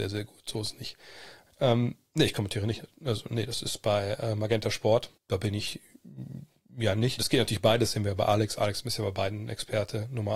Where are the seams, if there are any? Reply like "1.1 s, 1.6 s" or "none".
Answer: 1.5 s, 5.2 s, 7.2 s

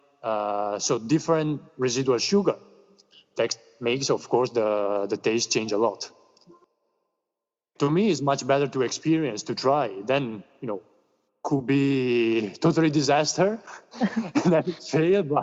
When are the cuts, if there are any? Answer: 7.7 s

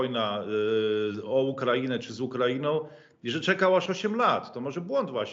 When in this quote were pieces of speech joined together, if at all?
none

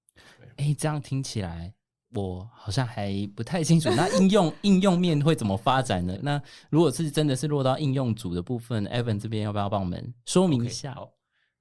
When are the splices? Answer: 6.2 s

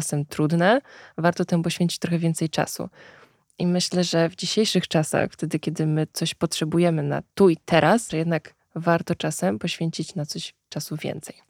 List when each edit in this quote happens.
8.1 s

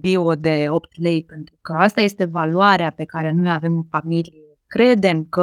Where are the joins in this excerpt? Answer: none

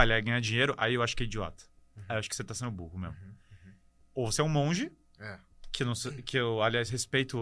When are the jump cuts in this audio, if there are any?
none

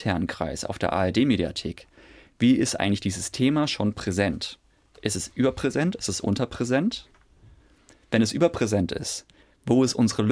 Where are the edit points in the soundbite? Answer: none

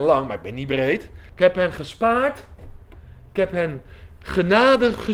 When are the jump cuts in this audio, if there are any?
1.3 s

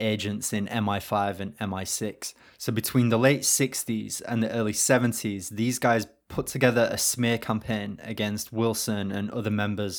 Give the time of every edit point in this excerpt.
none

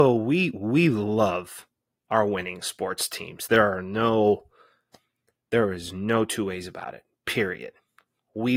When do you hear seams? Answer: none

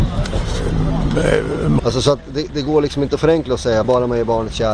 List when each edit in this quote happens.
1.8 s, 3.8 s

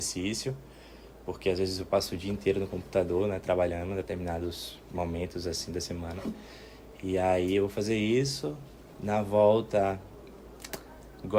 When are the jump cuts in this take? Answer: none

